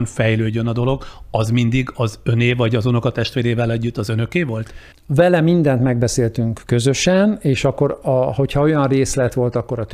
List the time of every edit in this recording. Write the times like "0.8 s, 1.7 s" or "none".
none